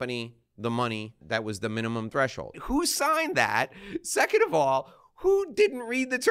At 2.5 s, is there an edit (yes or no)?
yes